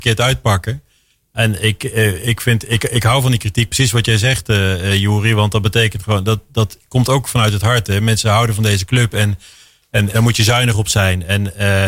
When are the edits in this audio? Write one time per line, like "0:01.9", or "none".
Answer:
0:10.1